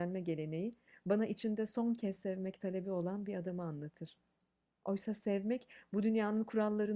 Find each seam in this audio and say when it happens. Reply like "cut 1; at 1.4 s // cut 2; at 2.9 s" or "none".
cut 1; at 4.7 s